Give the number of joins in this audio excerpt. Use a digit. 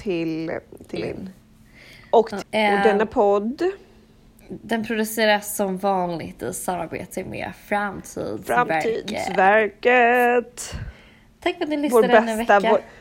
2